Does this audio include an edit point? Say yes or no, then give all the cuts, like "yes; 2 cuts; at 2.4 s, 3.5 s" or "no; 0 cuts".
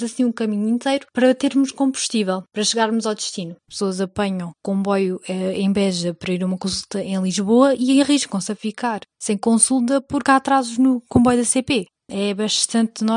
yes; 1 cut; at 3.7 s